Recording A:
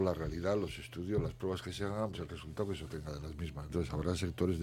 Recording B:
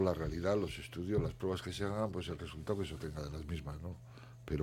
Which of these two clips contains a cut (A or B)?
A